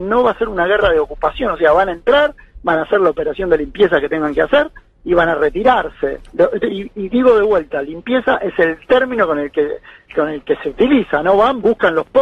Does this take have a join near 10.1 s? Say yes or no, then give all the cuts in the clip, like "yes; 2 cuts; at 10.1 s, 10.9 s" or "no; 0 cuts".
yes; 1 cut; at 10.1 s